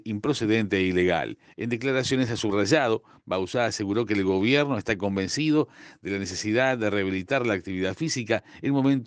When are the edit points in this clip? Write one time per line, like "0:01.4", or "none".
0:01.4